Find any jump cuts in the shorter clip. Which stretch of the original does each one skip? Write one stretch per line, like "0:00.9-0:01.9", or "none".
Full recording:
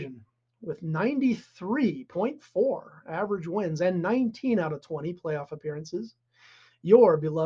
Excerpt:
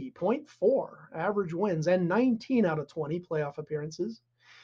none